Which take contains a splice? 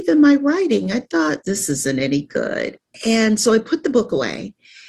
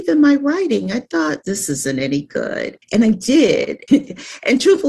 second; 2 cuts; at 2.8 s, 3.9 s

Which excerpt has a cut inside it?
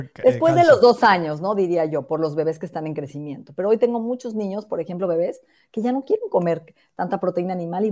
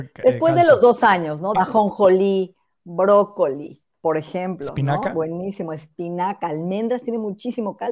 second; 1 cut; at 1.5 s

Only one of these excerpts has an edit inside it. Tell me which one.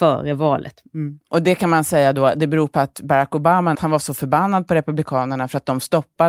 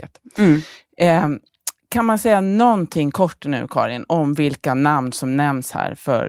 first; 1 cut; at 3.7 s

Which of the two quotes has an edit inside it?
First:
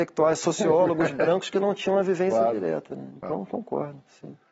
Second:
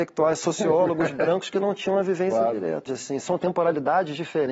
second; 1 cut; at 2.9 s

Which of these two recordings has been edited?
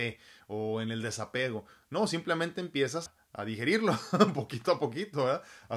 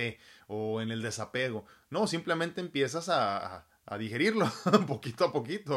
first; 1 cut; at 3.1 s

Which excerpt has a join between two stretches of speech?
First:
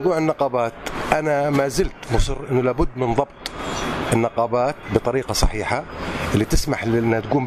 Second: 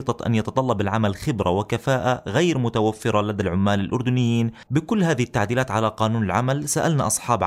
second; 1 cut; at 4.7 s

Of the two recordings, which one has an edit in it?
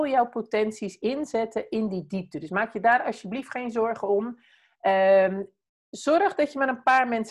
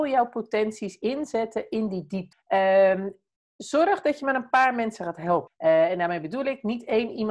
second; 2 cuts; at 2.3 s, 5.5 s

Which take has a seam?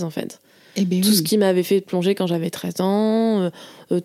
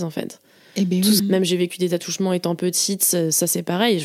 second; 1 cut; at 1.2 s

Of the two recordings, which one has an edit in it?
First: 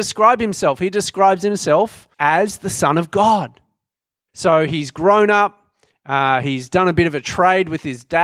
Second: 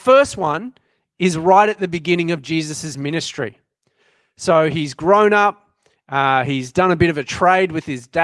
first; 2 cuts; at 2.1 s, 4.3 s

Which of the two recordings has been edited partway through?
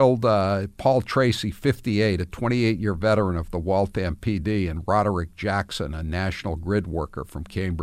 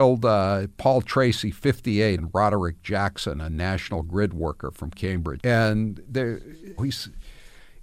second; 3 cuts; at 2.2 s, 5.4 s, 6.8 s

